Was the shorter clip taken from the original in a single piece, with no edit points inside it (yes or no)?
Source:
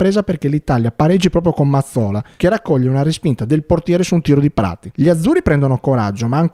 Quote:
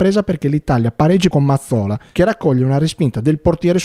no